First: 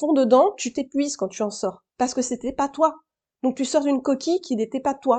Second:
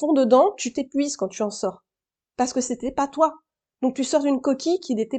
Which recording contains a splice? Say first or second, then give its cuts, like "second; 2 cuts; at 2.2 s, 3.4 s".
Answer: first; 1 cut; at 1.9 s